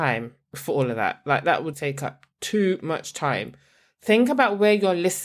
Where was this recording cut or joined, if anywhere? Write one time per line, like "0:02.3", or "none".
0:01.7